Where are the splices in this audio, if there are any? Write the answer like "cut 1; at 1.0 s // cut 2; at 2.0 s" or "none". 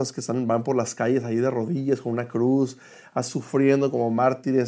none